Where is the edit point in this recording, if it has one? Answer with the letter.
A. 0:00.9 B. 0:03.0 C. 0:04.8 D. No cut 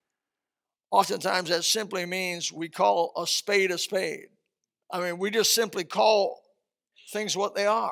C